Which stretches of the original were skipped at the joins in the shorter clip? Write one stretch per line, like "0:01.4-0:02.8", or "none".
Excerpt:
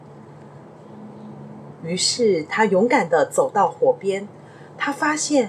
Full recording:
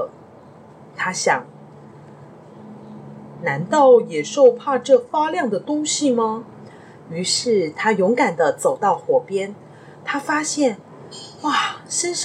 0:03.4-0:07.0